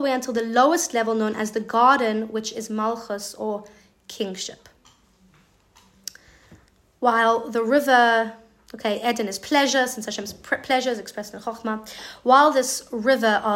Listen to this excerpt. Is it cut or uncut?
uncut